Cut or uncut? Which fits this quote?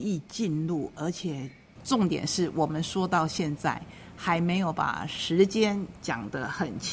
cut